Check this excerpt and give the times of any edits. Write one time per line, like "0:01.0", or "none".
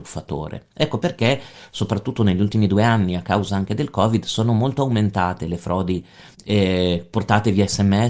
0:06.3